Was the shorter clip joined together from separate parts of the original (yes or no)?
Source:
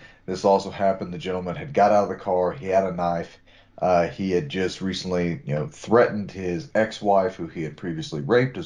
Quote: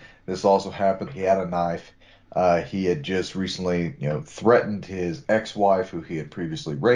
yes